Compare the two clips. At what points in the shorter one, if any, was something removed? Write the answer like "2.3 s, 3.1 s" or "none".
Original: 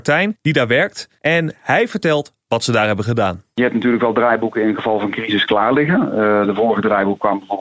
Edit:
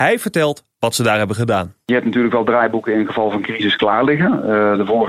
none